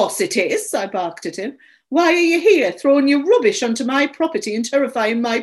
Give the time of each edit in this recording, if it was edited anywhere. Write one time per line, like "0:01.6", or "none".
none